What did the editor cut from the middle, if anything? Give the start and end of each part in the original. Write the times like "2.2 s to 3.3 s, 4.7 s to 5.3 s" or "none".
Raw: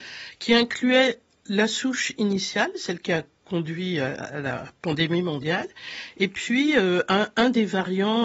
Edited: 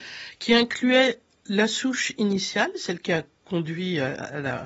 none